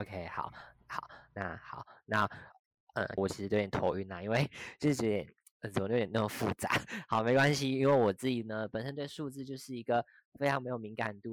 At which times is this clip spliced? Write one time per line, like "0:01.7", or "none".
0:03.2